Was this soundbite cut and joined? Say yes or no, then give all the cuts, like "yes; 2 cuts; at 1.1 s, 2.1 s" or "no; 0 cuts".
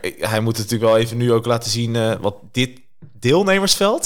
no; 0 cuts